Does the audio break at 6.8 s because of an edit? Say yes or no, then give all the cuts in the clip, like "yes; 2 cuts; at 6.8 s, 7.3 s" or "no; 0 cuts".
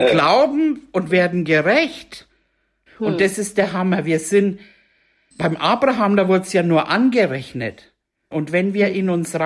no; 3 cuts; at 2.9 s, 5.3 s, 8.3 s